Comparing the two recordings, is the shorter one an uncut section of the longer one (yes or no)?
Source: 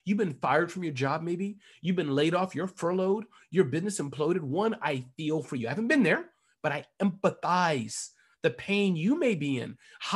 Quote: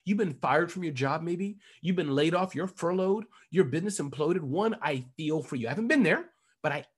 yes